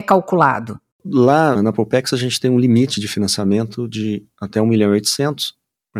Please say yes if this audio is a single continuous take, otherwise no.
no